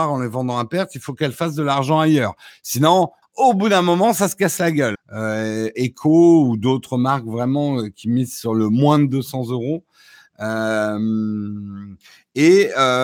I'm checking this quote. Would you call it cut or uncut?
cut